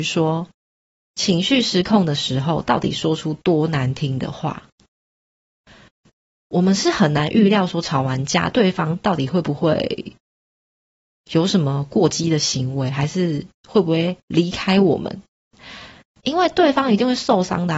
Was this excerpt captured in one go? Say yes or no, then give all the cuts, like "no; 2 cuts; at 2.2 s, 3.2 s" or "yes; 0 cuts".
no; 1 cut; at 16.1 s